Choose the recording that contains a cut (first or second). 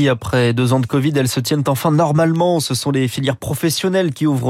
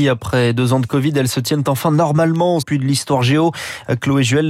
second